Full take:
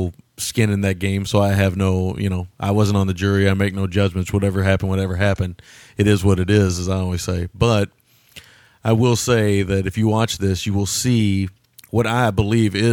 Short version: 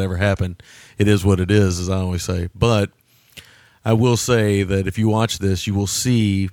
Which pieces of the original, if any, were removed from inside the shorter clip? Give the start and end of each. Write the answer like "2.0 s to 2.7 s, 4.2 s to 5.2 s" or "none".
none